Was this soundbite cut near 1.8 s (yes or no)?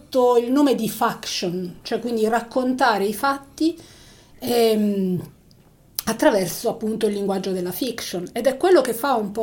yes